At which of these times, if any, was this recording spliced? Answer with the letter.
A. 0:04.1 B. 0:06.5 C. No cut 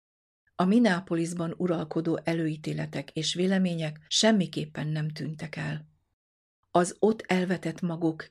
A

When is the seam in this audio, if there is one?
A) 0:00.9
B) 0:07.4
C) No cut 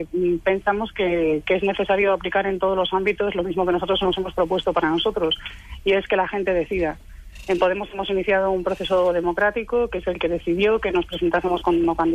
C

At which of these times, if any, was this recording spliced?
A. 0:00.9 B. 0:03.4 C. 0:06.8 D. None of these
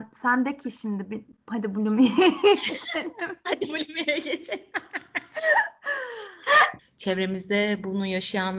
C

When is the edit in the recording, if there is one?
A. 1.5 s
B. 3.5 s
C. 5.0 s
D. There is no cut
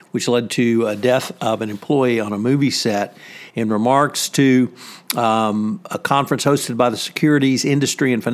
B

